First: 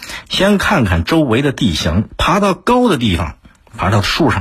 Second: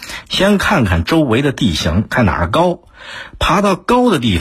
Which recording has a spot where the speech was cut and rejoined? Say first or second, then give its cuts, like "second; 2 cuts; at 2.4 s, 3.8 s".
first; 1 cut; at 2.1 s